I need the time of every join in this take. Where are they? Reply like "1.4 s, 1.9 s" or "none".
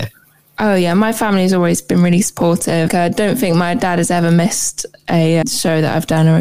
2.9 s, 5.4 s